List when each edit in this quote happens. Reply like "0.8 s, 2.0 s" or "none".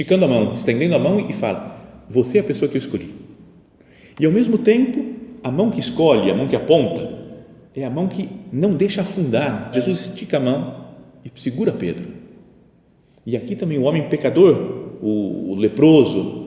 9.7 s